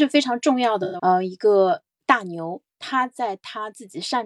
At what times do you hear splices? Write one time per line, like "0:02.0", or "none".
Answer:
0:01.0
0:02.7